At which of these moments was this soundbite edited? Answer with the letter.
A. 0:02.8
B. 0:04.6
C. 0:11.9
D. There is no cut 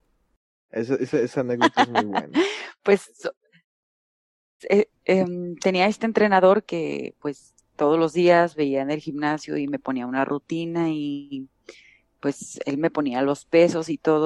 B